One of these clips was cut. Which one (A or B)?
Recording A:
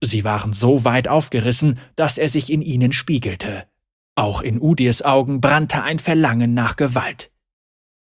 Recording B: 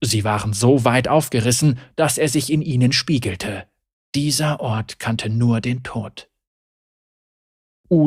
B